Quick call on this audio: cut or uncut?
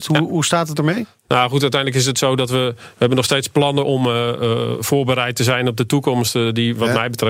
uncut